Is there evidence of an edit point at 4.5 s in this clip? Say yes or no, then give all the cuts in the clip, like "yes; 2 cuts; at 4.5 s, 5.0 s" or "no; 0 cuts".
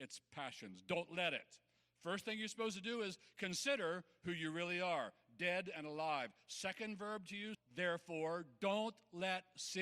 no; 1 cut; at 7.5 s